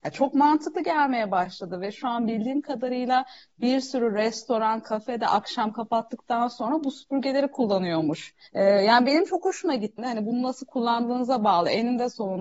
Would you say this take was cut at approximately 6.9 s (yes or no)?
no